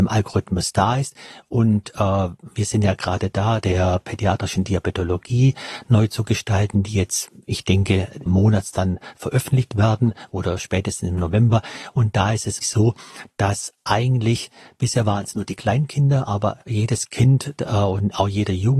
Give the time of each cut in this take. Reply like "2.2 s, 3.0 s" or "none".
3.6 s, 8.3 s, 12.6 s